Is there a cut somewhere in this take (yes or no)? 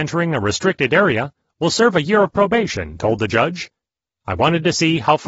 no